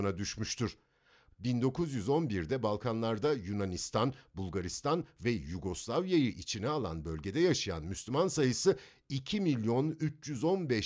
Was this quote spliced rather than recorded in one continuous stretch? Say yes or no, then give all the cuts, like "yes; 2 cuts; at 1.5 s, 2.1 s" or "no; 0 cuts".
yes; 1 cut; at 1.3 s